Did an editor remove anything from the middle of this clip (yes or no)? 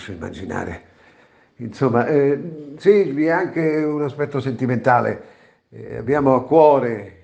no